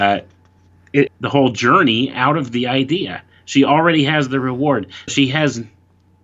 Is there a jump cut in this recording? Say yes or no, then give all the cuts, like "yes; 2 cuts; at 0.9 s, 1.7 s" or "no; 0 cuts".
yes; 2 cuts; at 1.1 s, 5.1 s